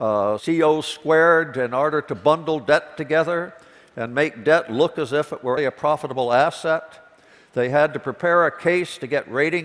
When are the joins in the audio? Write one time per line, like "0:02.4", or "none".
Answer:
0:05.6